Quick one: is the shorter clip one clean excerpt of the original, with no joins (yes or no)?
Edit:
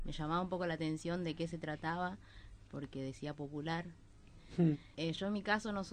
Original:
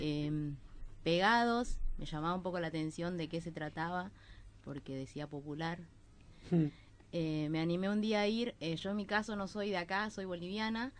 no